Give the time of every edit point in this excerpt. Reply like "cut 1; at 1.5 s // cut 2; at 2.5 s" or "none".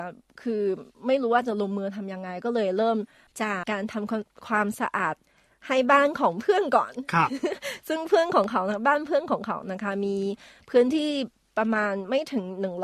cut 1; at 3.6 s